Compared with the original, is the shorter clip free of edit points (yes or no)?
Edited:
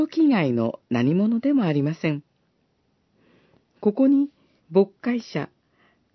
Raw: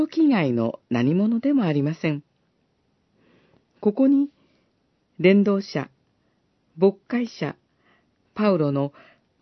no